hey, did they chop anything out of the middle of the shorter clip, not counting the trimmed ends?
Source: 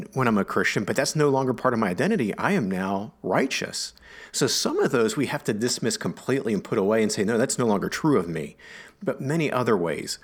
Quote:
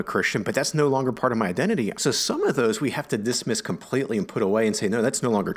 yes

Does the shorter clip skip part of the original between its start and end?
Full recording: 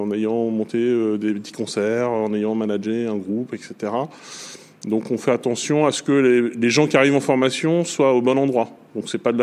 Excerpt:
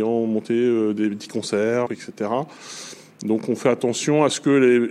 yes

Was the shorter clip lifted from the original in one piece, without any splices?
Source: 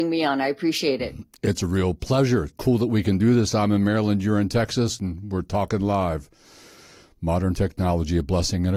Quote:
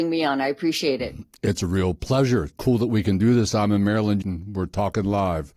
no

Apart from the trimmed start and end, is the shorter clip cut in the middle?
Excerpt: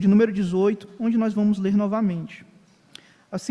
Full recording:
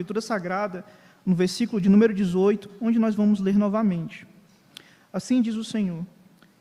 no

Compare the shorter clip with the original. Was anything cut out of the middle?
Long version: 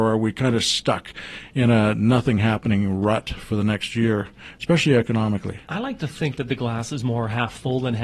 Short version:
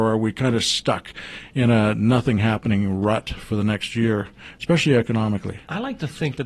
no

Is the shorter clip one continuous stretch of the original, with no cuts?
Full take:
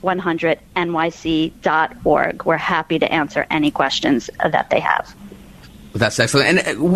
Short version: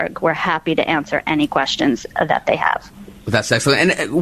no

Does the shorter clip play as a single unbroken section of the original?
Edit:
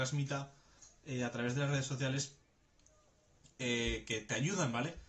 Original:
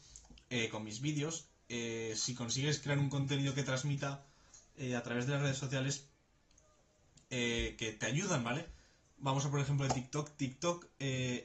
yes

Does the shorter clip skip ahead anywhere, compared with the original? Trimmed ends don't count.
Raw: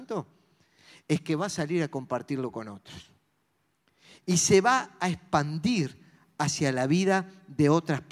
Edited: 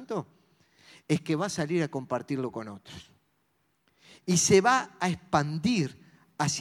no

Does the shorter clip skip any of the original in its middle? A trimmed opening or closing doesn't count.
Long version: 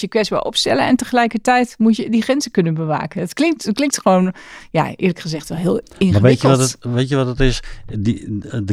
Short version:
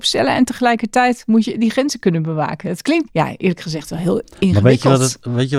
yes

